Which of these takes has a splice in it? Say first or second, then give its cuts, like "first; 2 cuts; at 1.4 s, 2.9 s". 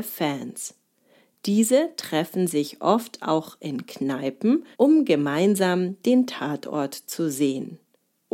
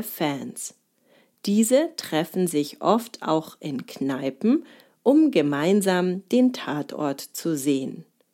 first; 1 cut; at 4.7 s